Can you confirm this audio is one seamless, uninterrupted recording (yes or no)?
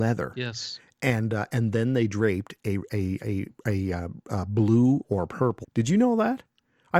no